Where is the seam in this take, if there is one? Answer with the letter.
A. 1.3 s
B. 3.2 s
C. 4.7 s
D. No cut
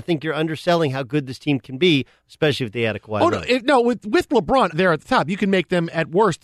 C